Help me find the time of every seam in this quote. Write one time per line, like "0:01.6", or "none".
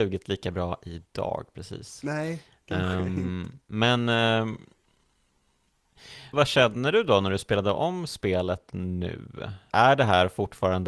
0:06.3
0:09.7